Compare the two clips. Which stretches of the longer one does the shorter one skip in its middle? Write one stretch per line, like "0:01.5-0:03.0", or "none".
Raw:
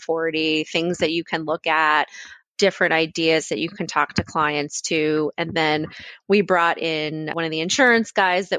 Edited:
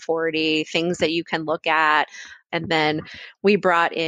0:02.5-0:05.3

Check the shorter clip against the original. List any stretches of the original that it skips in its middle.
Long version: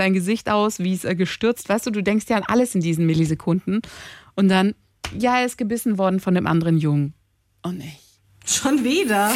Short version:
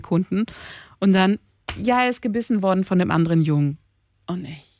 none

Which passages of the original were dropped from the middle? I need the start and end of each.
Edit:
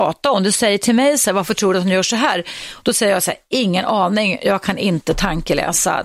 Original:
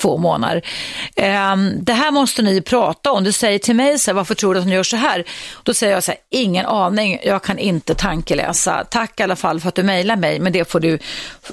none

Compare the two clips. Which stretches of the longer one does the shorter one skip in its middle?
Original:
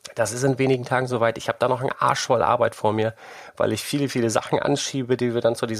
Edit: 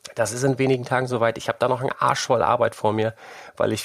none

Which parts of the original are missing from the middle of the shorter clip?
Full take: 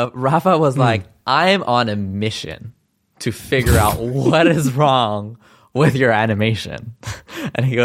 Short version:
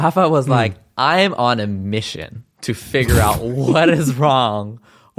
0:02.8-0:03.1

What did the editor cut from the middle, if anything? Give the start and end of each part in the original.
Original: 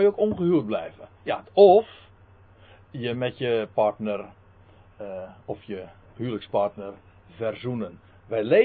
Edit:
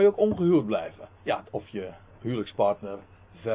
0:01.5-0:05.4

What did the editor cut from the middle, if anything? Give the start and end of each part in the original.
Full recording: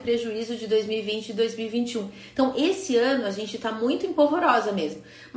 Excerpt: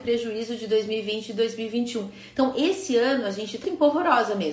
0:03.6-0:04.0

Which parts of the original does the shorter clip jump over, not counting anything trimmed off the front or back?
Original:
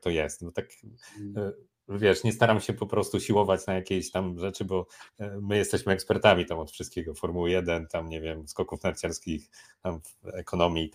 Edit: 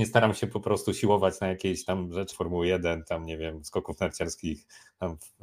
0:04.6-0:07.1

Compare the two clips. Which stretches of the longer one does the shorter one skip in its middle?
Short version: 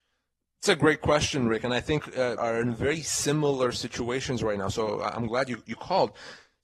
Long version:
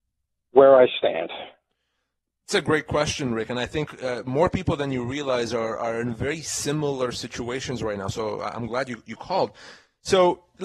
0:04.2-0:05.8

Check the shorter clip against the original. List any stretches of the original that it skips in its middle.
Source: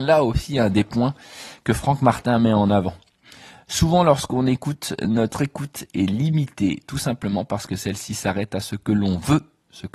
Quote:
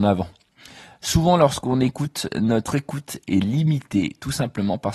none

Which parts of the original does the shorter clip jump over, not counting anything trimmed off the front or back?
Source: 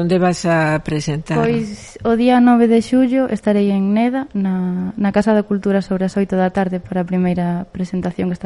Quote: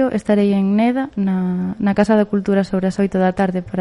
none

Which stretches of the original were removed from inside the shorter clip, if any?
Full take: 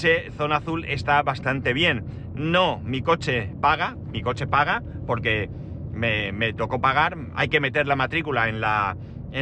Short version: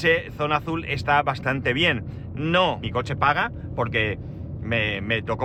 0:02.8-0:04.1

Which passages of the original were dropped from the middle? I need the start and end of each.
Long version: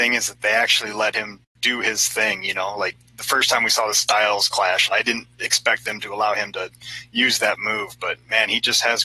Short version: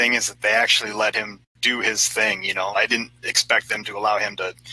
0:02.7-0:04.9

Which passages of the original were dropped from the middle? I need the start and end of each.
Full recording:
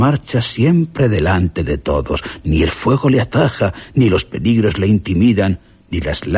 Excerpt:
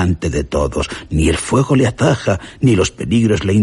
none

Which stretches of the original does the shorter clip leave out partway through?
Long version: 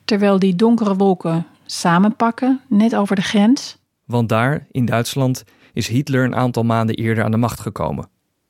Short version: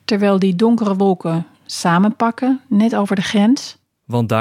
none

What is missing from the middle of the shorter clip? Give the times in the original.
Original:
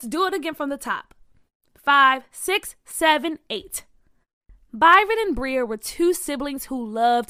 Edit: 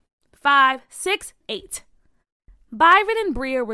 0:02.8-0:03.4

